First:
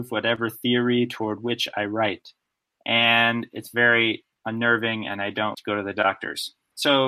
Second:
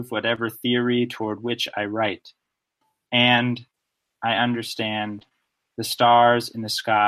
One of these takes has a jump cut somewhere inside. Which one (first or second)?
first